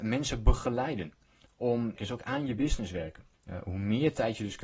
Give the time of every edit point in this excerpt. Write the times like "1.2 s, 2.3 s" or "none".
2.0 s, 3.3 s